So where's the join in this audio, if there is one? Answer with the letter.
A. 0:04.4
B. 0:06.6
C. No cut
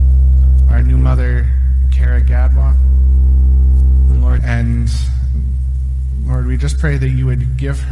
A